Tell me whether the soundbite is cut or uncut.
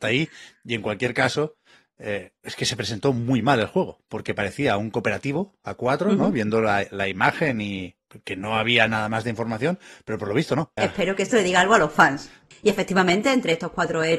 cut